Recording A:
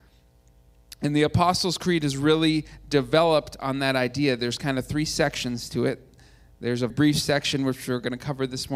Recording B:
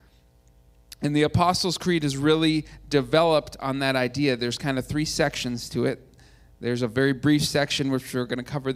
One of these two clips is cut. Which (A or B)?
A